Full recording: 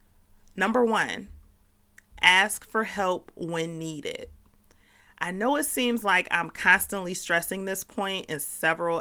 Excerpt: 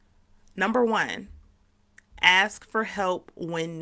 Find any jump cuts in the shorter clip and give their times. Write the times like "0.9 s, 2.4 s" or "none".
none